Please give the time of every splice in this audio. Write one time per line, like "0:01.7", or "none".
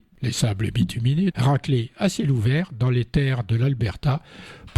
0:01.3